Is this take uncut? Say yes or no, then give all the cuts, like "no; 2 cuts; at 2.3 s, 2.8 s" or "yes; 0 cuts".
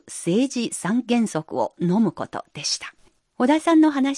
no; 1 cut; at 3.2 s